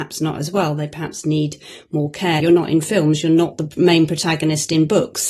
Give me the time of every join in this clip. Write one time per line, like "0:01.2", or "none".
0:02.4

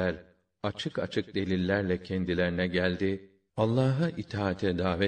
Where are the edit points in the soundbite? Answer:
0:03.5

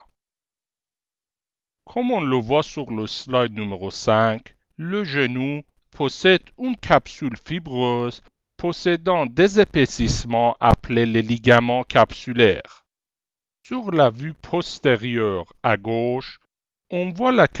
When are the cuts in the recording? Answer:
0:04.6

